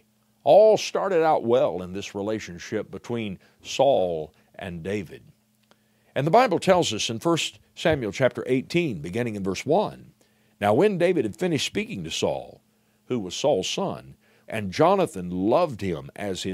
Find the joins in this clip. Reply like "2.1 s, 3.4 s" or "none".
13.0 s, 14.4 s